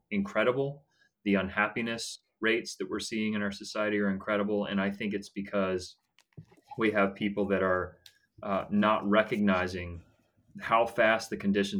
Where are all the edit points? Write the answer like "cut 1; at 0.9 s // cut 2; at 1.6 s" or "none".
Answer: none